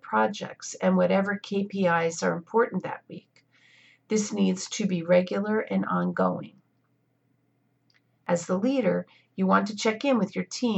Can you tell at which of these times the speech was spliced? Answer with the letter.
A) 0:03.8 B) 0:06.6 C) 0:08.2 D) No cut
C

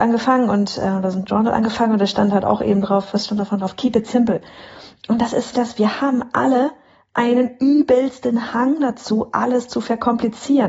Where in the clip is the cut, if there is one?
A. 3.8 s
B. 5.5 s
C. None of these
B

